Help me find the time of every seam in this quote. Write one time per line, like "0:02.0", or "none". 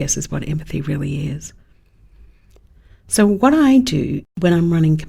none